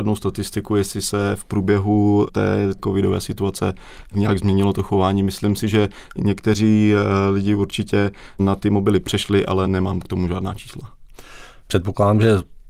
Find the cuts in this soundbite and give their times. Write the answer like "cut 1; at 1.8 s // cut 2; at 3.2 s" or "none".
none